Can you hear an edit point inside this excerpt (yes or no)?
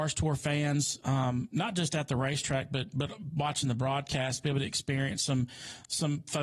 no